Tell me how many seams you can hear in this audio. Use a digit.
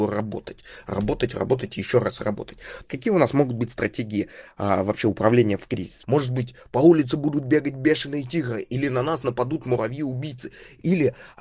2